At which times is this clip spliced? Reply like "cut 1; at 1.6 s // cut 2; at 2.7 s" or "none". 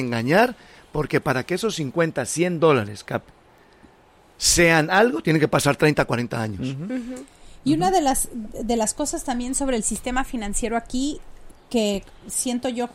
none